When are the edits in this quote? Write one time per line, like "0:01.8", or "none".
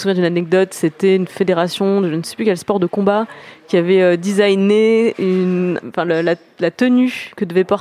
0:05.8

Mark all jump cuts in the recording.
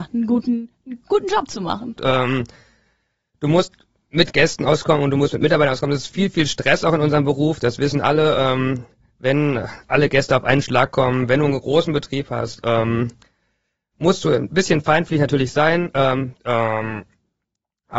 0:02.0
0:16.3

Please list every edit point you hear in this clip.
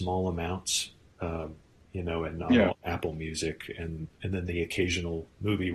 0:02.7

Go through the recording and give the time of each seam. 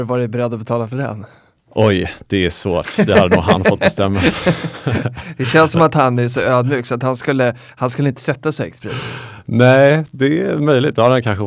none

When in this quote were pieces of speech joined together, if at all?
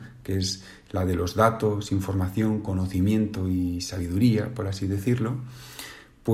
none

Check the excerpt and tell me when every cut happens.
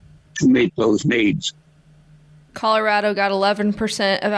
0:02.5

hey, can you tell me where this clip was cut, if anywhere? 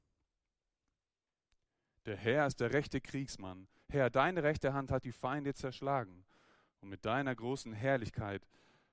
0:03.8

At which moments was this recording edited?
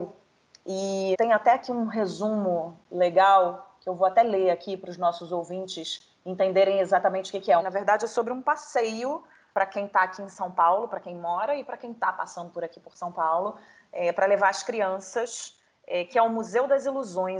0:01.1
0:07.6

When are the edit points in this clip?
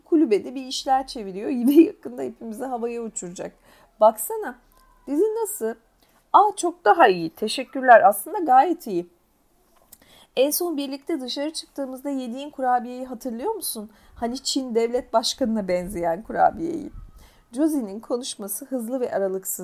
none

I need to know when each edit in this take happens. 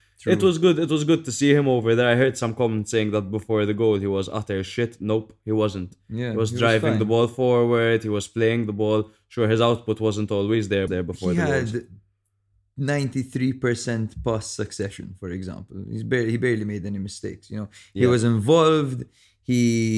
0:10.9

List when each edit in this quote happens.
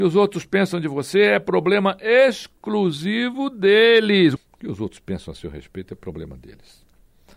0:04.4

